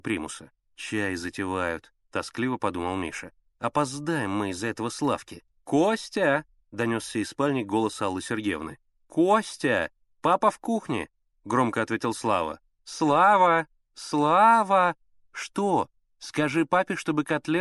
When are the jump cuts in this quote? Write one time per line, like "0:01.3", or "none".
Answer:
none